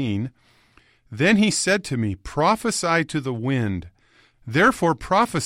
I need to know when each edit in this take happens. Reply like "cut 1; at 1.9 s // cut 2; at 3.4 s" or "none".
cut 1; at 4.3 s